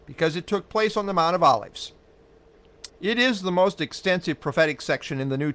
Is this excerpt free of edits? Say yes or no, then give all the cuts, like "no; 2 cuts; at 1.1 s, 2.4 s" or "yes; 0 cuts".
no; 1 cut; at 2.9 s